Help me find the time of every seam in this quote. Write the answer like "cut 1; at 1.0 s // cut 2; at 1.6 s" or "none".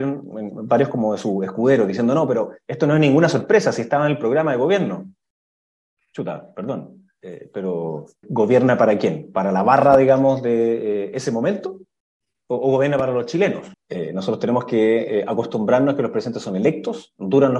cut 1; at 8.2 s // cut 2; at 13.7 s